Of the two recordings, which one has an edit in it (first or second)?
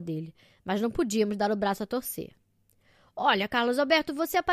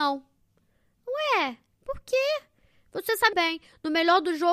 second